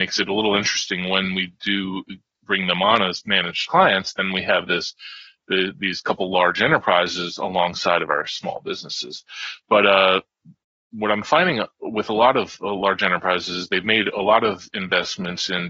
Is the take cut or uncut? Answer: uncut